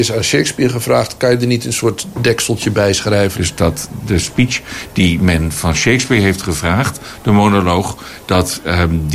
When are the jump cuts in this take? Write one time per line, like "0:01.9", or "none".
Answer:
0:03.3